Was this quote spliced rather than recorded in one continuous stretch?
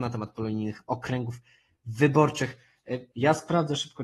yes; 1 cut; at 3.1 s

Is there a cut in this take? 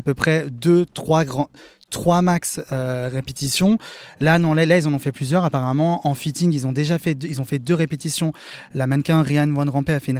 no; 0 cuts

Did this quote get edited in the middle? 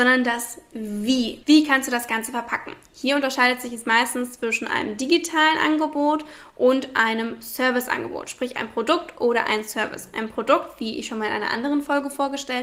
yes; 1 cut; at 1.4 s

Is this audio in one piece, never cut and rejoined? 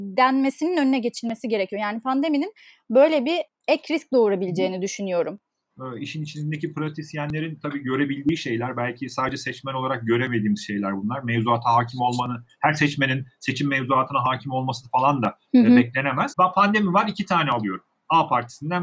no; 2 cuts; at 5.7 s, 16.3 s

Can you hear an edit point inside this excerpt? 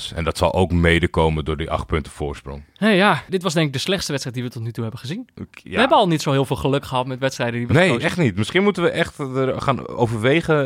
yes; 1 cut; at 3.3 s

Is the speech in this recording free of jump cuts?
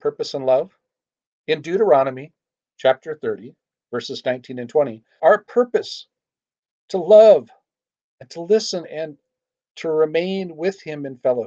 no; 2 cuts; at 1.3 s, 5.2 s

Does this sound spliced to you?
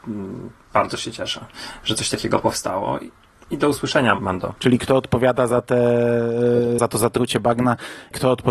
yes; 2 cuts; at 4.6 s, 6.8 s

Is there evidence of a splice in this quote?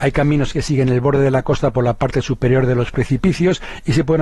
no; 0 cuts

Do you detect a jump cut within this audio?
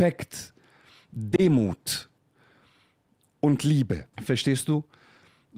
yes; 1 cut; at 4.1 s

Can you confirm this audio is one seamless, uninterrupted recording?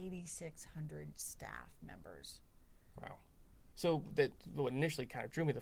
no; 1 cut; at 3.7 s

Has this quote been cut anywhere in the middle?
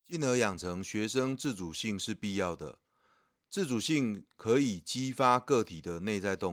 no; 0 cuts

